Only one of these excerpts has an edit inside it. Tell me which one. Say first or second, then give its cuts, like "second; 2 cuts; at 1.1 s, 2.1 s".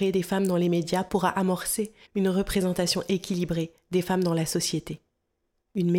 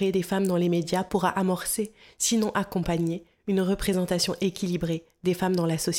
first; 1 cut; at 2.1 s